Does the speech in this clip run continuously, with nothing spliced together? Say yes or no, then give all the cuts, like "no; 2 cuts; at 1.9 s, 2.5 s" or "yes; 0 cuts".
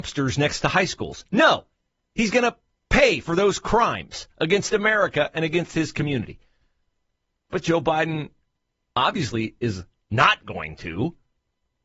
yes; 0 cuts